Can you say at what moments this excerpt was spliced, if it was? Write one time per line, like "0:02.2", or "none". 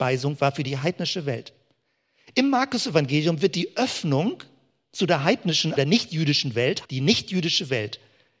0:05.8
0:06.8

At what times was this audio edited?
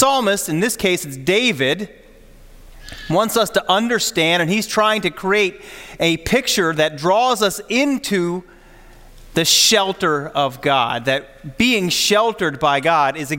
none

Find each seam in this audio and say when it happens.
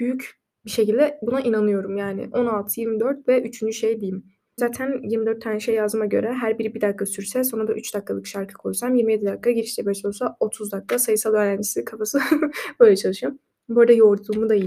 0:04.6

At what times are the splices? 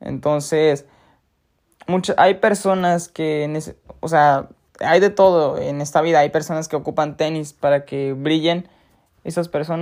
none

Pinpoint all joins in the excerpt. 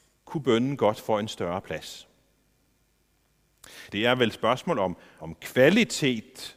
0:03.9
0:05.2

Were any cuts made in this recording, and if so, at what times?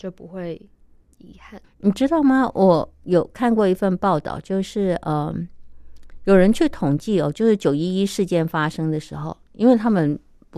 0:01.6

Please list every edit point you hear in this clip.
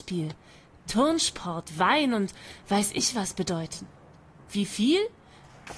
0:04.5

